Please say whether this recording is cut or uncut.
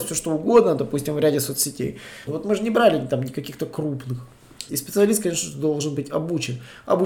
cut